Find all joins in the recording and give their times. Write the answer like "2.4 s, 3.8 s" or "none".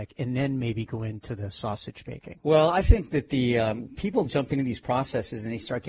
none

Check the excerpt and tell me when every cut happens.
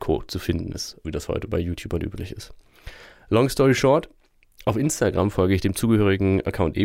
1.0 s

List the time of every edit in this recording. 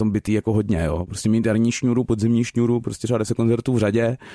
1.1 s

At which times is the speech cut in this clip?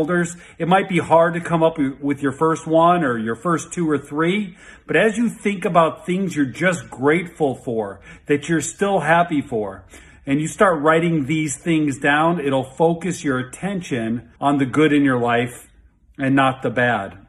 14.4 s

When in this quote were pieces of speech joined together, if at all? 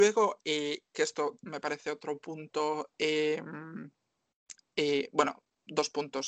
none

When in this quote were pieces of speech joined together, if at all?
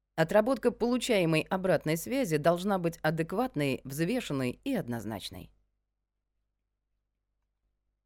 3.8 s

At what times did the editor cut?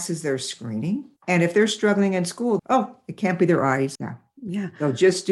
1.2 s, 2.6 s, 4.0 s

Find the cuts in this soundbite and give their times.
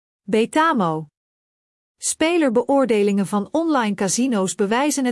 none

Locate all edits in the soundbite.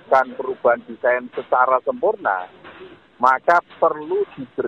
3.0 s

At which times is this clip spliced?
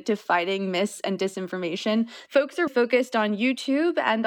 2.7 s

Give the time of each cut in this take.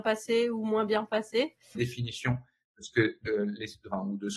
1.7 s, 3.3 s

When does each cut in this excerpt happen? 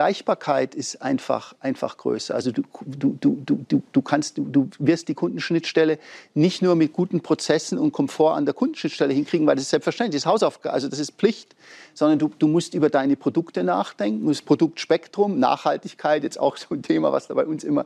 none

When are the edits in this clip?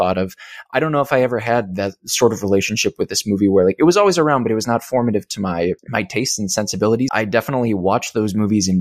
5.8 s, 7.1 s

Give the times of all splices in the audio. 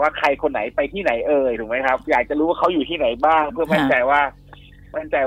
2.0 s

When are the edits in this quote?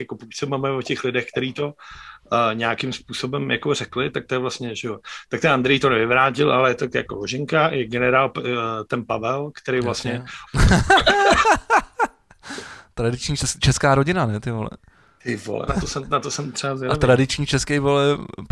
10.5 s, 15.7 s

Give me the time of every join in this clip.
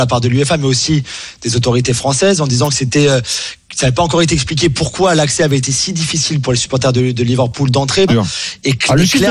8.1 s

